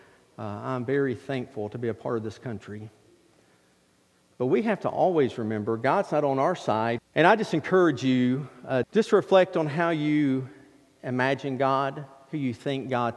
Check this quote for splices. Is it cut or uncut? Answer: cut